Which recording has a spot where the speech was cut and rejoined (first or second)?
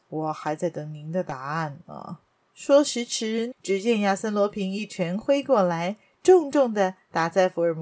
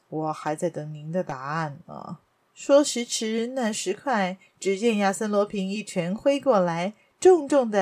first